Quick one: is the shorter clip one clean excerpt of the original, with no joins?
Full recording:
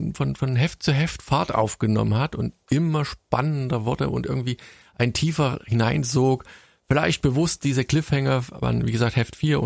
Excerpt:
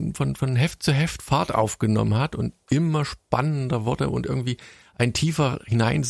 yes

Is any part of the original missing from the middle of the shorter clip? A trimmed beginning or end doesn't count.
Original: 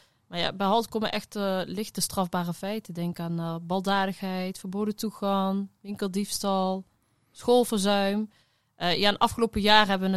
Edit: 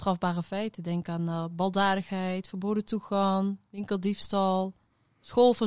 no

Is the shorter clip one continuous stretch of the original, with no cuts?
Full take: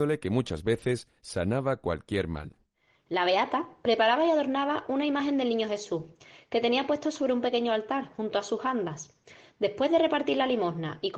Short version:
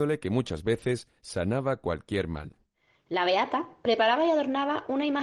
yes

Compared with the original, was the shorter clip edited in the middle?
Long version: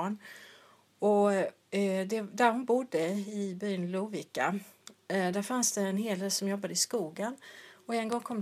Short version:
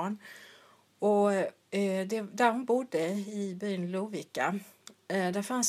no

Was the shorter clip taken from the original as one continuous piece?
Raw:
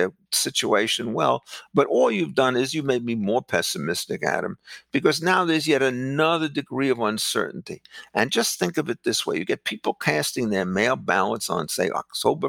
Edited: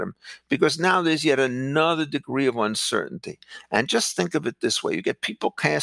yes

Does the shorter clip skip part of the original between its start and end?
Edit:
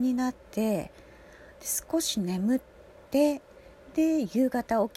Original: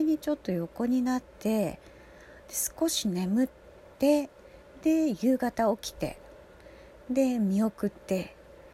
no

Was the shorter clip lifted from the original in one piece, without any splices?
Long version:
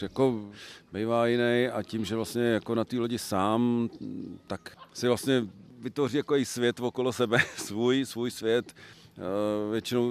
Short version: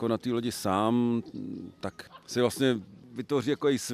yes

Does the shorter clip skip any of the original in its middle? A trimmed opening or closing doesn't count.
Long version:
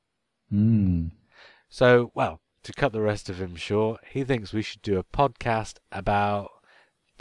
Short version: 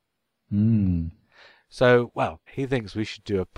yes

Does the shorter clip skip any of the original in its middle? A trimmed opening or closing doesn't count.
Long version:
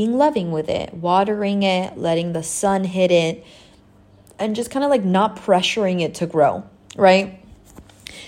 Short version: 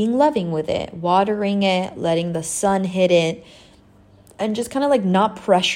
no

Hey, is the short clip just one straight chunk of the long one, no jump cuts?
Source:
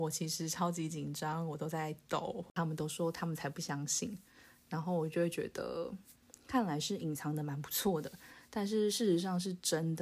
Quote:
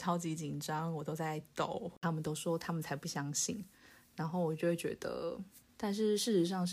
no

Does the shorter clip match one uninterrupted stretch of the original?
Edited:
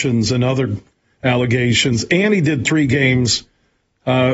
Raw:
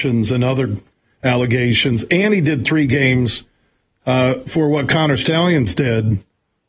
yes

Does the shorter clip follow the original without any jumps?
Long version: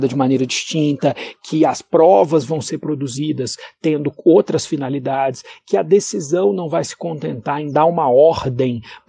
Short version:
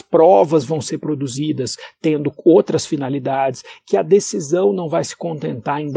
yes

